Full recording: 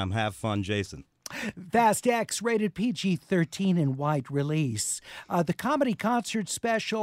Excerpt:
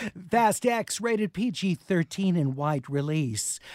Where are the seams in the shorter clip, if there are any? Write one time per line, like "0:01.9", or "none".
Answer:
none